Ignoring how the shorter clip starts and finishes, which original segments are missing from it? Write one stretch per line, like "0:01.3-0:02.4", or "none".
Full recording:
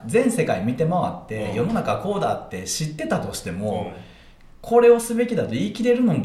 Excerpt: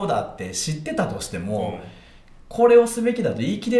none